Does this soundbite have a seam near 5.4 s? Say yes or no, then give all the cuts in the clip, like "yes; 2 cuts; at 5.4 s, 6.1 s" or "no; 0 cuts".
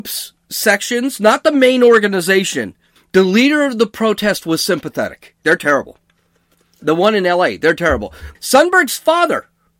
yes; 3 cuts; at 3.0 s, 5.4 s, 8.4 s